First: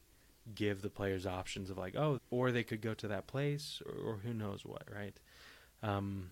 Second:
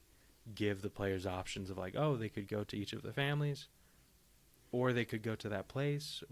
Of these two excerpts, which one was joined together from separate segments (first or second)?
first